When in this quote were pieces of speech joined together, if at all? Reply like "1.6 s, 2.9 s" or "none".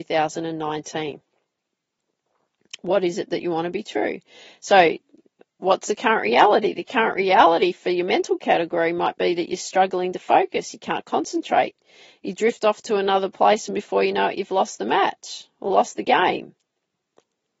none

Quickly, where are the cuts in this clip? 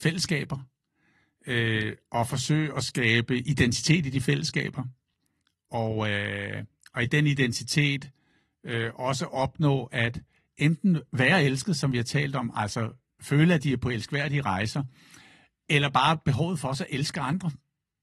none

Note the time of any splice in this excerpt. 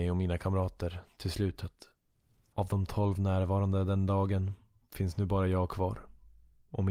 2.5 s

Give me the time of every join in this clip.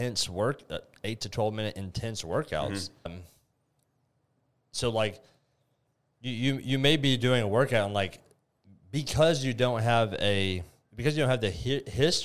3.1 s

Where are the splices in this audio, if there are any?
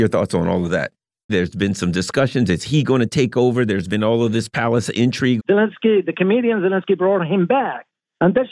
1.3 s, 5.4 s

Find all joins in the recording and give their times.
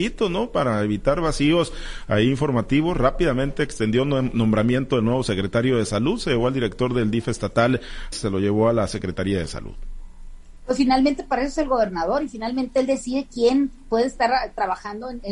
8.1 s

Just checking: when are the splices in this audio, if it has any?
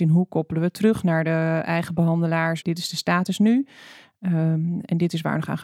2.6 s

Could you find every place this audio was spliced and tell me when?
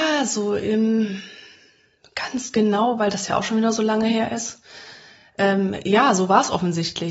none

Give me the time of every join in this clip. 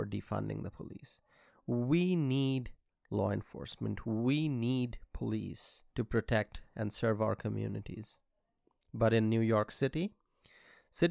5.9 s

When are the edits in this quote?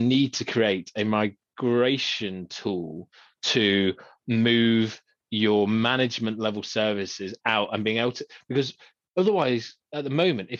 none

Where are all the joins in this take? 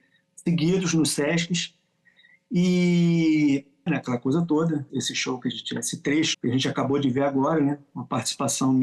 3.9 s, 4.9 s, 6.3 s

